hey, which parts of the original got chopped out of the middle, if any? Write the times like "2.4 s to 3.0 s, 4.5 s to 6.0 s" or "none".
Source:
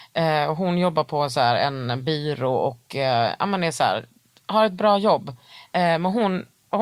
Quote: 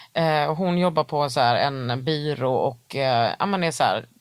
none